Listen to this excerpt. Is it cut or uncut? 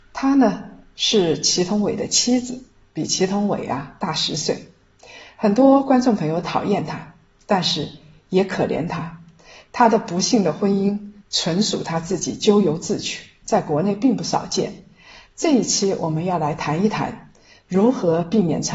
cut